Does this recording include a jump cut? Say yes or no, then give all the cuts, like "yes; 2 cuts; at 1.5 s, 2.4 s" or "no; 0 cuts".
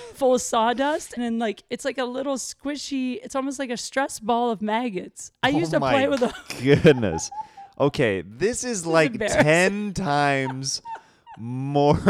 yes; 1 cut; at 1.2 s